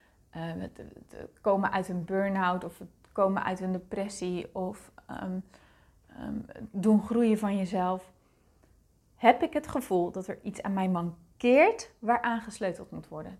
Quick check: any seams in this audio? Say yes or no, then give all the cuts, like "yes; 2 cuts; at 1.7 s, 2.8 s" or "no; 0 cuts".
no; 0 cuts